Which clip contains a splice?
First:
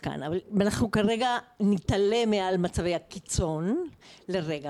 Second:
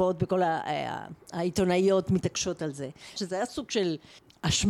second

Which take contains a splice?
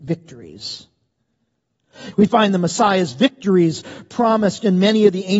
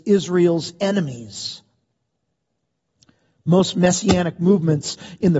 first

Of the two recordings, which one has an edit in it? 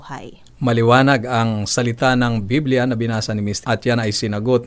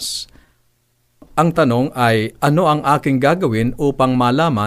first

